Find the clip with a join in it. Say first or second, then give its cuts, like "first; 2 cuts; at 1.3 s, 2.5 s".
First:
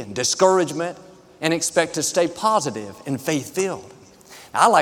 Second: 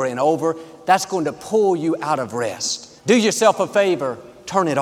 second; 1 cut; at 3.0 s